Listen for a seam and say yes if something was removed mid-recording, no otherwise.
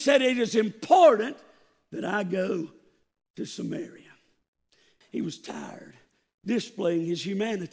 yes